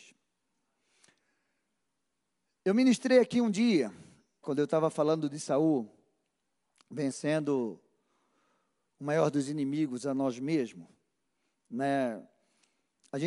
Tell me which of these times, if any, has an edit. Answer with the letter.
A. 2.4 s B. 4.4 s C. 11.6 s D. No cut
B